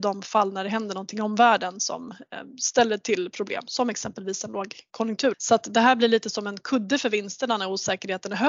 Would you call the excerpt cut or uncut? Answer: cut